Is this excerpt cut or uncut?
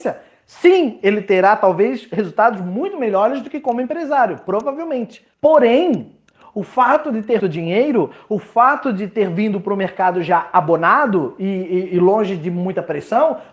cut